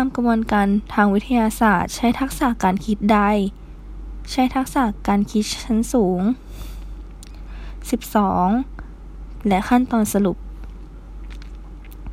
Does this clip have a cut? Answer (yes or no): yes